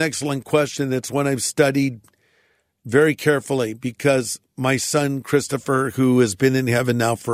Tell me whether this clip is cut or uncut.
uncut